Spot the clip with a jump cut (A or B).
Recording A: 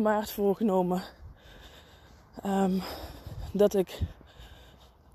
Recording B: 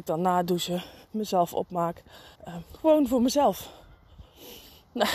B